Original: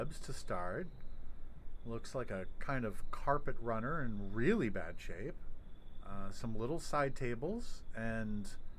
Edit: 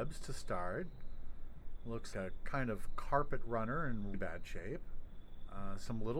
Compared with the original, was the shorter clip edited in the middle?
yes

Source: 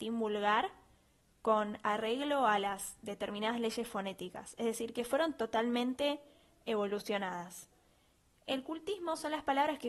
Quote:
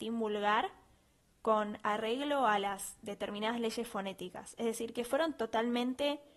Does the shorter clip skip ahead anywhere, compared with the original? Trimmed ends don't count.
no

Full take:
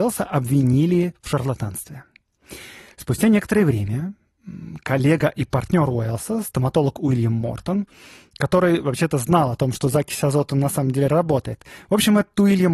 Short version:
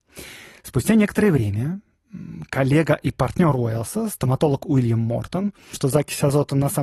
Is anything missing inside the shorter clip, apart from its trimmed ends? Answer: yes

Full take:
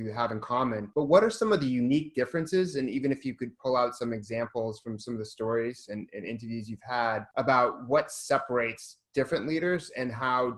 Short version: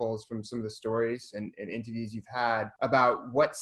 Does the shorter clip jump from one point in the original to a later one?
no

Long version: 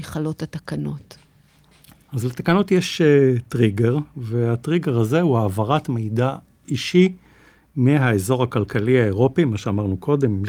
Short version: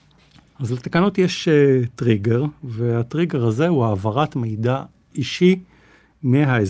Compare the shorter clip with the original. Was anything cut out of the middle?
no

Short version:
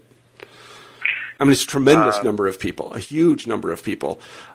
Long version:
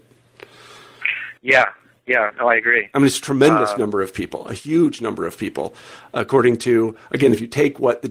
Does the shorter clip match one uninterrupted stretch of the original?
no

